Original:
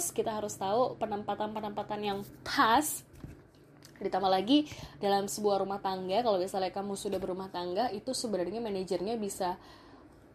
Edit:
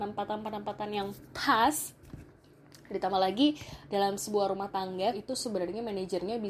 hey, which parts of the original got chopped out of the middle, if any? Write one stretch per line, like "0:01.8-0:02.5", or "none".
0:06.2-0:07.9